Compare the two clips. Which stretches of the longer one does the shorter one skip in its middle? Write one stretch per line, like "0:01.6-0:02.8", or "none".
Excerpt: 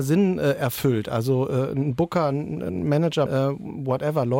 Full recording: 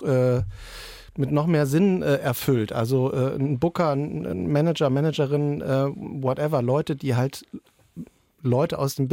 0:04.9-0:05.6